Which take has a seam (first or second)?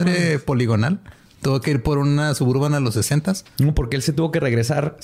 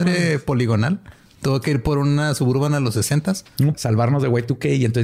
second